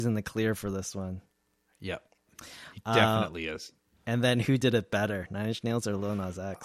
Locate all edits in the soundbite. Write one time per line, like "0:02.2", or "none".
none